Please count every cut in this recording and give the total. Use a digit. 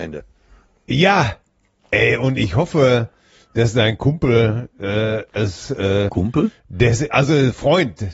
2